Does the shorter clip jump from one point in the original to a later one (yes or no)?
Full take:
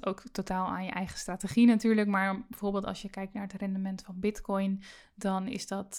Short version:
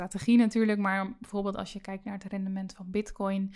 no